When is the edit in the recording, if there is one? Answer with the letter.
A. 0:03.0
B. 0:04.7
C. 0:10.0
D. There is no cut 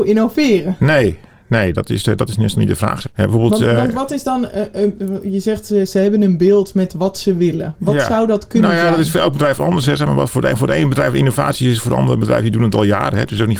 A